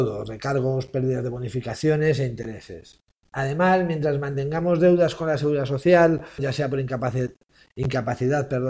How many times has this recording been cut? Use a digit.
1